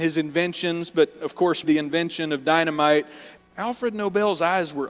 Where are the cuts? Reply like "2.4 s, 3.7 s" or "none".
1.6 s, 3.4 s